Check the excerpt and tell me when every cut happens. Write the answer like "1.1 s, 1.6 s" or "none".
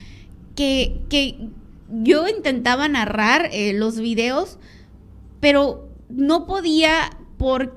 6.0 s